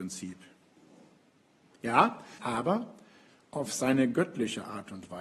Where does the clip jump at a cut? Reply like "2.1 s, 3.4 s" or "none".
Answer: 2.4 s

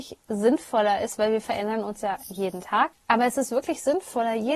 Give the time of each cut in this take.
2.9 s

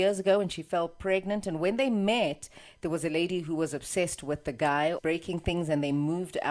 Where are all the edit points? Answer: 5.0 s

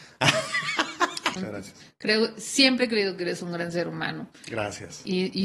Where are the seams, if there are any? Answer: 1.4 s

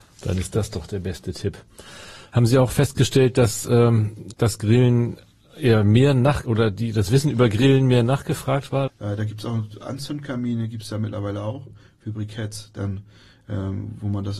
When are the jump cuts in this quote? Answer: 4.3 s, 6.4 s, 8.9 s

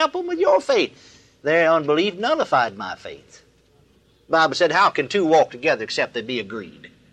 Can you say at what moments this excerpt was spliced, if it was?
none

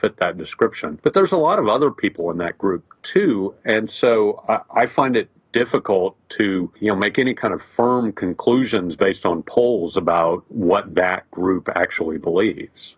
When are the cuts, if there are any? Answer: none

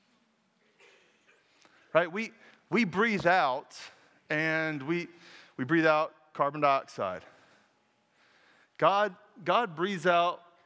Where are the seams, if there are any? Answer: none

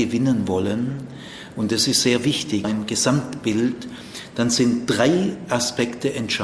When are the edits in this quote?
2.6 s

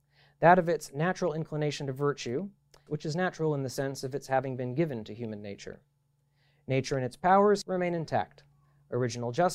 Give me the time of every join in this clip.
2.9 s, 7.6 s

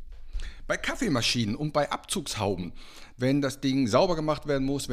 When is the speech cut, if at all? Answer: 3.2 s

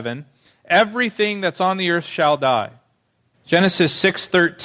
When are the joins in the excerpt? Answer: 3.3 s

